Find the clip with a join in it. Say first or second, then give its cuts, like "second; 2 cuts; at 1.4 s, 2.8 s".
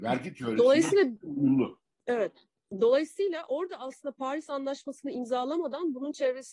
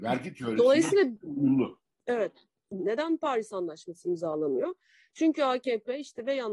second; 1 cut; at 2.8 s